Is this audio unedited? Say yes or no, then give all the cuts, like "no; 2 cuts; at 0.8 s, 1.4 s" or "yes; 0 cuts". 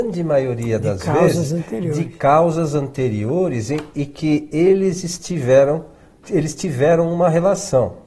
no; 1 cut; at 6.2 s